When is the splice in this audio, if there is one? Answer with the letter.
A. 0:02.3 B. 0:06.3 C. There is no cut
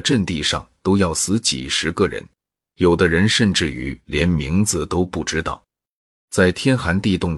B